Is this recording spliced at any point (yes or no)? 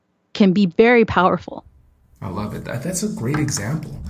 no